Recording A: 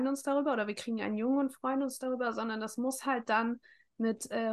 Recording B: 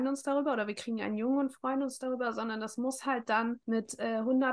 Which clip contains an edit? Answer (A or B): B